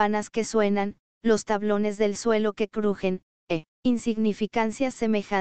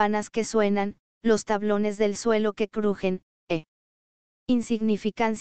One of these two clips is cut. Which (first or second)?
first